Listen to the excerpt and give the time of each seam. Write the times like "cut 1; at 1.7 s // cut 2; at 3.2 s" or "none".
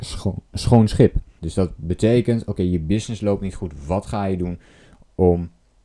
cut 1; at 1.4 s